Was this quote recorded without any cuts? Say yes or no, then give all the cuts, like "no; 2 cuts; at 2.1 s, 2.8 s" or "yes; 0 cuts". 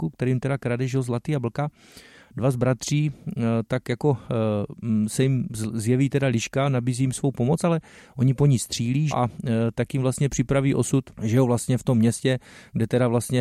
no; 2 cuts; at 9.1 s, 11.1 s